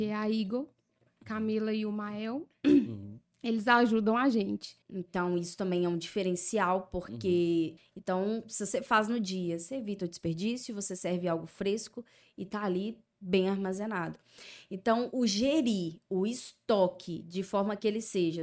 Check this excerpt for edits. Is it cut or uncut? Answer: cut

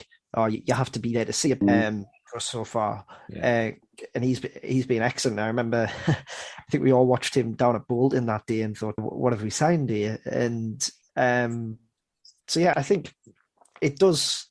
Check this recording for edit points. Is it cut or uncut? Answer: cut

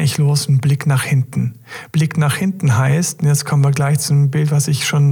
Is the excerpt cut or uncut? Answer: uncut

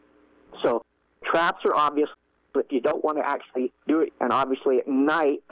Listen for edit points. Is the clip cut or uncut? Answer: cut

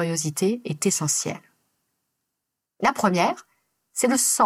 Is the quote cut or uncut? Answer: cut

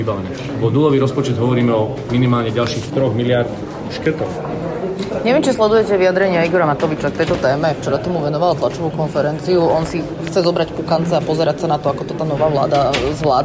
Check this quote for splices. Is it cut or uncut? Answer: uncut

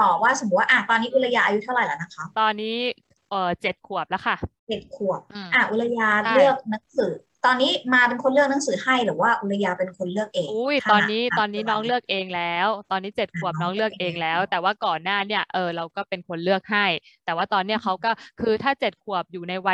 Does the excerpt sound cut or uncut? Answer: cut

